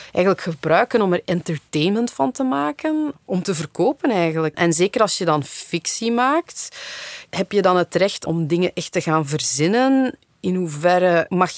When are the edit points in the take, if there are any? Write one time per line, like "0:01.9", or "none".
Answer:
0:04.5
0:07.3

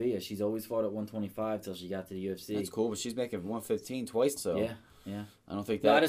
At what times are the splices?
0:04.4

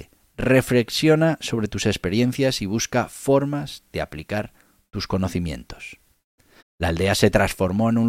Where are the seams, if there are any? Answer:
0:06.6

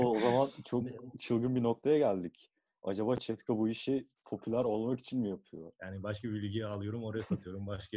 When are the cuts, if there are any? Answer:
0:04.1
0:05.8

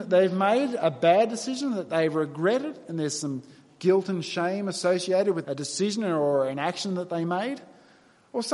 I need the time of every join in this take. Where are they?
0:05.4

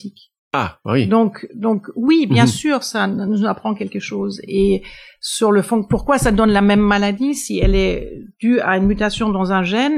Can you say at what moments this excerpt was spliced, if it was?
none

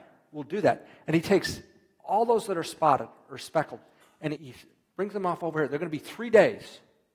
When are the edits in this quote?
0:04.4

